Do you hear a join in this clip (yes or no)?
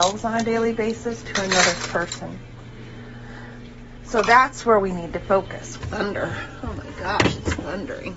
yes